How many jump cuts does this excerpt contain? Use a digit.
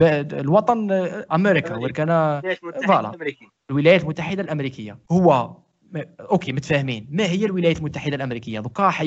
2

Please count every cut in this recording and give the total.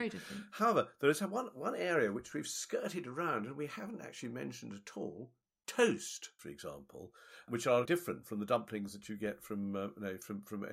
2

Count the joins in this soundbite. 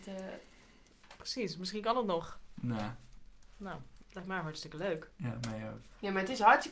1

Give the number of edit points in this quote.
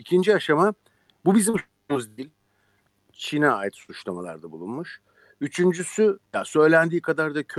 1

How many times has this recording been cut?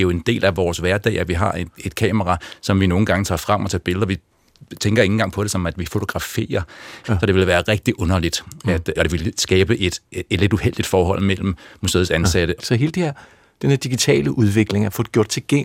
3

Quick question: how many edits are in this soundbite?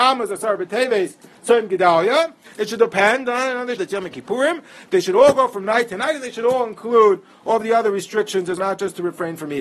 3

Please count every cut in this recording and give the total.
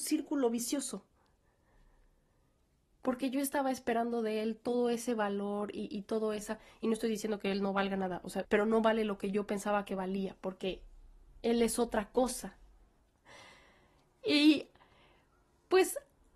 2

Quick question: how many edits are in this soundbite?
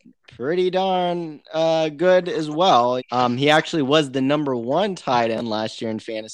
1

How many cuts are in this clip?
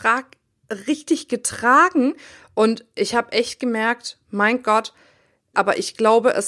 1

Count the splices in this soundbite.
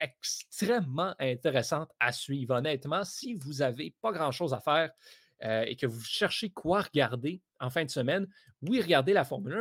0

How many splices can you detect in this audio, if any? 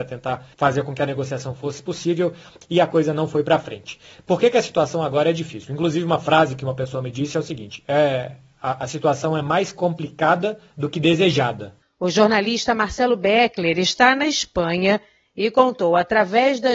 1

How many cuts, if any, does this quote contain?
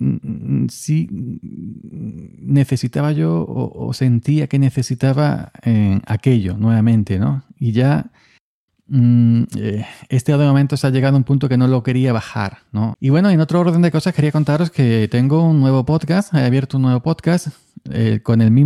1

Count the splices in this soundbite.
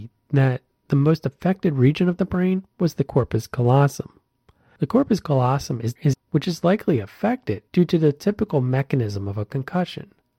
2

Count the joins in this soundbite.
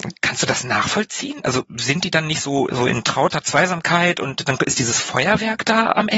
2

